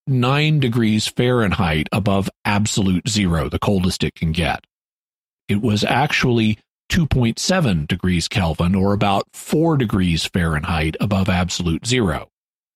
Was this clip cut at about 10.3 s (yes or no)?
no